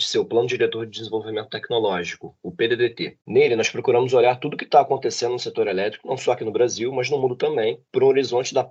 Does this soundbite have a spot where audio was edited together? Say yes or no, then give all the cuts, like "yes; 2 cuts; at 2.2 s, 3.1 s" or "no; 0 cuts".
no; 0 cuts